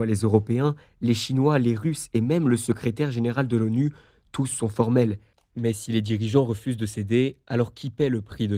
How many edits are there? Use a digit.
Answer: 1